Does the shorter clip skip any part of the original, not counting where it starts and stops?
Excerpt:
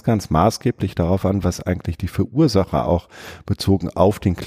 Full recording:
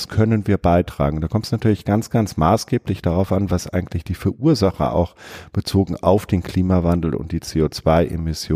no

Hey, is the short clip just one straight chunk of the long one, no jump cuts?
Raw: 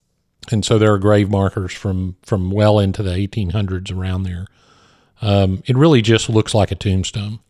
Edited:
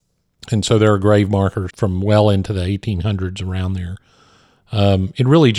no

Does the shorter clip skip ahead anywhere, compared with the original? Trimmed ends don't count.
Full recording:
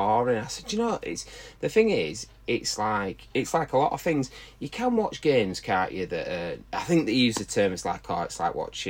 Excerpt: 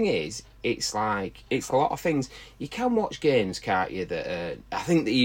yes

